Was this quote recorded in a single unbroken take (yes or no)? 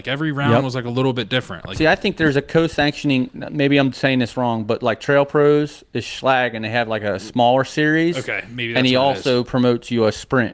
yes